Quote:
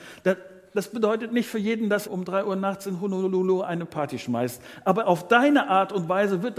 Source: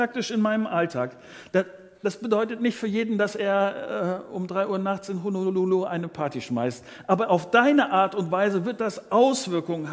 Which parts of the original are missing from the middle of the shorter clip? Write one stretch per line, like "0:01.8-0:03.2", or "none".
0:03.3-0:04.3